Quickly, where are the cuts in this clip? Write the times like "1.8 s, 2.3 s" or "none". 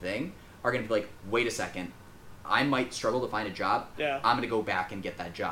3.9 s